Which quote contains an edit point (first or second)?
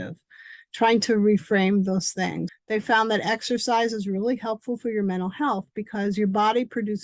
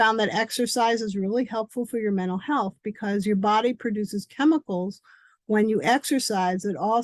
first